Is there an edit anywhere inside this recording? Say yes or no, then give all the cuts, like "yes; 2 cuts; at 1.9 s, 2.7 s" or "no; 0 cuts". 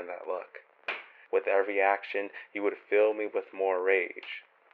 yes; 1 cut; at 1.3 s